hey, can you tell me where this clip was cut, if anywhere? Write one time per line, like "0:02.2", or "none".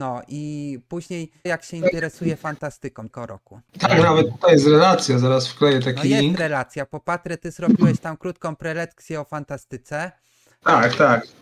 0:01.5
0:03.1